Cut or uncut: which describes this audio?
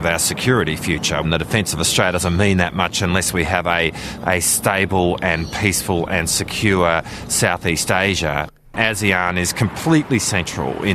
cut